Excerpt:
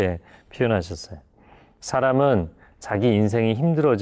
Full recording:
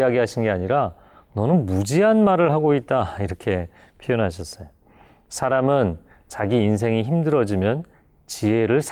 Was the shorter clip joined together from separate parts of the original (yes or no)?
no